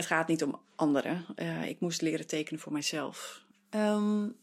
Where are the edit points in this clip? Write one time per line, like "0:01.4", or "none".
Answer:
0:03.5